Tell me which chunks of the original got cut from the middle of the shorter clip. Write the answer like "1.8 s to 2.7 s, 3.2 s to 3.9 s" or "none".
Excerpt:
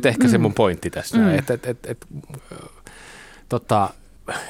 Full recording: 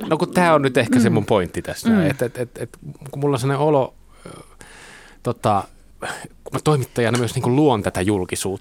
3.1 s to 4.1 s